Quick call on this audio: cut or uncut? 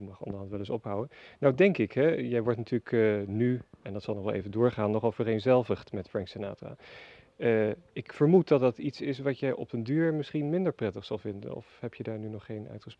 cut